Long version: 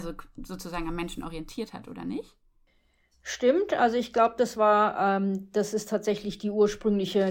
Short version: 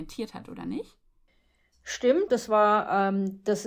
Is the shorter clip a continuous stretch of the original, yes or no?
no